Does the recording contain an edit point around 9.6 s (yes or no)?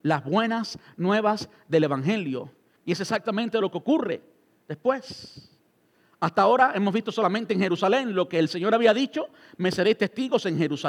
no